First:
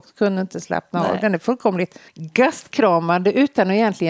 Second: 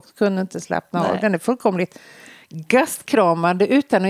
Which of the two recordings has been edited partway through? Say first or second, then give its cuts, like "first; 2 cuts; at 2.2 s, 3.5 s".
first; 1 cut; at 2.1 s